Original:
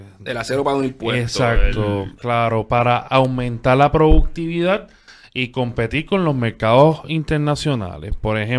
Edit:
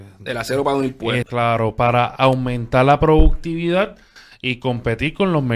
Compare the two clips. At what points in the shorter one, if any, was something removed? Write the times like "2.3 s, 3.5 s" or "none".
1.2 s